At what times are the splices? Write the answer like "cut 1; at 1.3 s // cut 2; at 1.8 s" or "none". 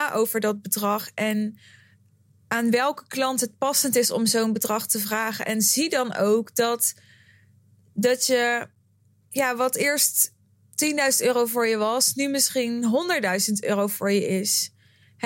none